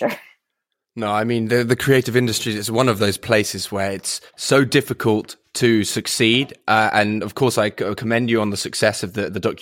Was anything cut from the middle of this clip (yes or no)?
yes